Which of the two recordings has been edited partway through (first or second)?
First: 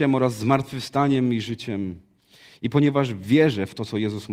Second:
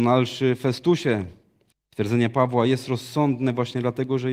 second